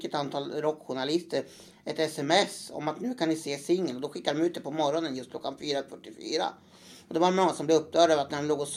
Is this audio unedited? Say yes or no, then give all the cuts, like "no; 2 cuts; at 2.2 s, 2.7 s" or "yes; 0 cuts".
yes; 0 cuts